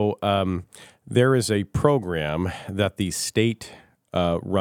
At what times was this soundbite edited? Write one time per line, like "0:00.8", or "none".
none